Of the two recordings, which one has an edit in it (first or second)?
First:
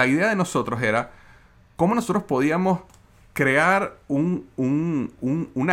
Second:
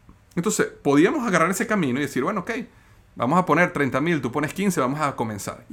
second